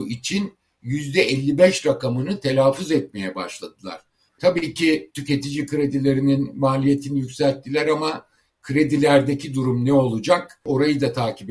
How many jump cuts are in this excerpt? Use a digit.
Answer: 1